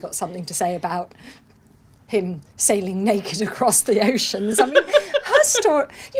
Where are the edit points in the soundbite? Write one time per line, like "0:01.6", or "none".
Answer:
none